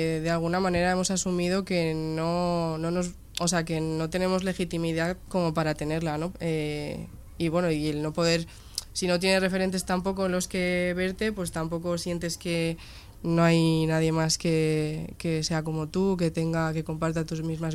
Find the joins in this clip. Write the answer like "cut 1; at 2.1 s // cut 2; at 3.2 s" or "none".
cut 1; at 6.3 s